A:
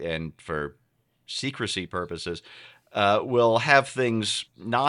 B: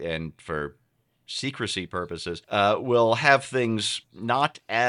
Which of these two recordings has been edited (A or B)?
B